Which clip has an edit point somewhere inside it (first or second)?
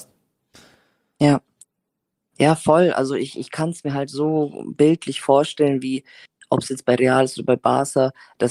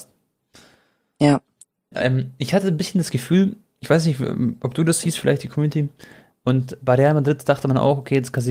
second